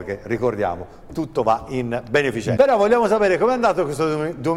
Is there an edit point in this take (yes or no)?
yes